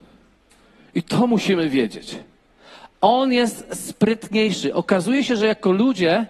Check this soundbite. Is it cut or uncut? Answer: uncut